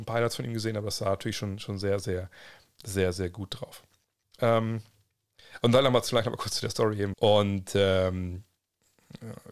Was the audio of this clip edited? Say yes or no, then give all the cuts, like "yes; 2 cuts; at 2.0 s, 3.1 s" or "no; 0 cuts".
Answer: yes; 1 cut; at 7.1 s